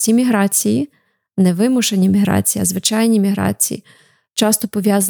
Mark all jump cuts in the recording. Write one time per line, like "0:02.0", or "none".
none